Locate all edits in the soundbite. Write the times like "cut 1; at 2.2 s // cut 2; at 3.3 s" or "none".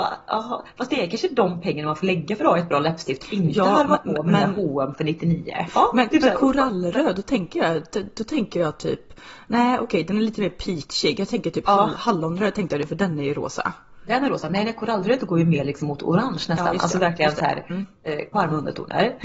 cut 1; at 5.7 s // cut 2; at 18.3 s

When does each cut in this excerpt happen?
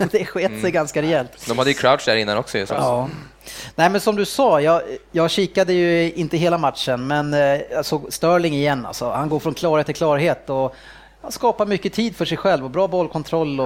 cut 1; at 2.7 s

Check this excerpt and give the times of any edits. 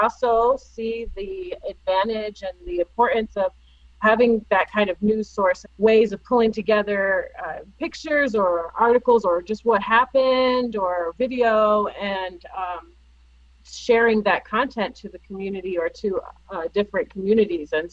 cut 1; at 5.6 s

